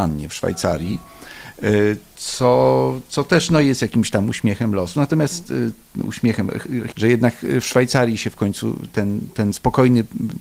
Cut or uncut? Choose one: cut